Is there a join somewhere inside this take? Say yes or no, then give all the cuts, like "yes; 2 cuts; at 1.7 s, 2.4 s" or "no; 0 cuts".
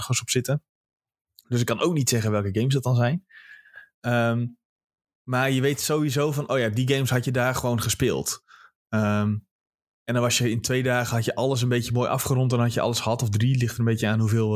no; 0 cuts